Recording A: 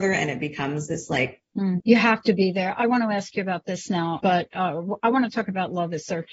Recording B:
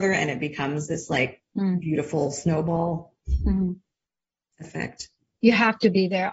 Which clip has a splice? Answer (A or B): A